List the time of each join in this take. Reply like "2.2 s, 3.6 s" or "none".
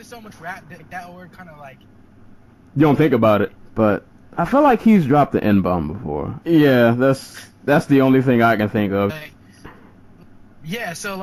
3.6 s, 6.4 s, 9.1 s